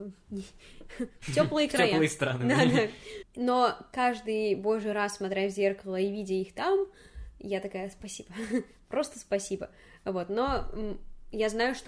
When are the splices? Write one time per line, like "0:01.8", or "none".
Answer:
none